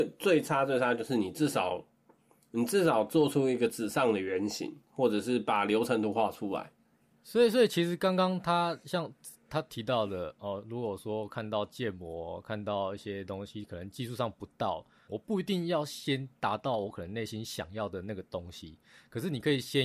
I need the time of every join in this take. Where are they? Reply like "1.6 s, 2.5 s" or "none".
15.1 s